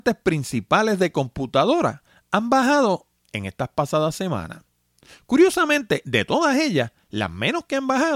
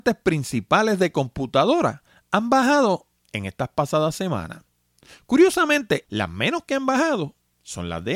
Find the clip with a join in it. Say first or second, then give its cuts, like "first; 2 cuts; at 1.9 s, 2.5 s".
second; 1 cut; at 6.0 s